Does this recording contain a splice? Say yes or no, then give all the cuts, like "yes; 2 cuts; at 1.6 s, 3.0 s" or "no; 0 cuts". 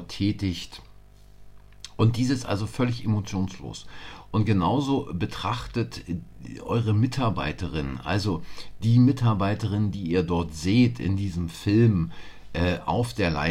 no; 0 cuts